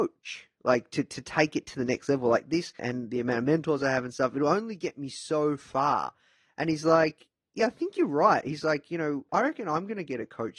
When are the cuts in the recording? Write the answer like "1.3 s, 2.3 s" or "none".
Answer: 2.8 s, 9.3 s